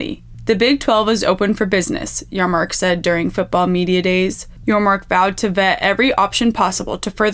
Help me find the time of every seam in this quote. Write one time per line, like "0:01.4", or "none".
0:04.6